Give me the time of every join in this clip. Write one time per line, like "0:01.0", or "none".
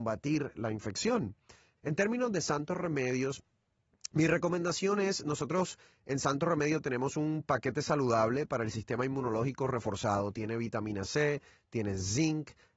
0:01.8